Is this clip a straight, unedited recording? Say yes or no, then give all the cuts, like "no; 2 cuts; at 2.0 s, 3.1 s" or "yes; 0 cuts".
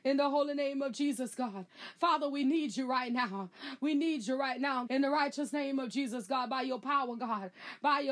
no; 2 cuts; at 1.9 s, 4.9 s